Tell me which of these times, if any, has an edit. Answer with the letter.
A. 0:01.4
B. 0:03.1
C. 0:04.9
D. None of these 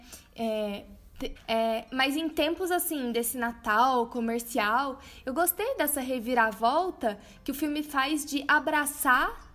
A